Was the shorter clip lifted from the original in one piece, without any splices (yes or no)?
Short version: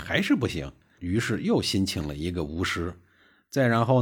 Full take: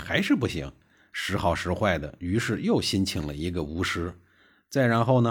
no